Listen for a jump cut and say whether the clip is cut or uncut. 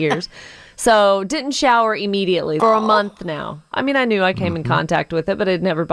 cut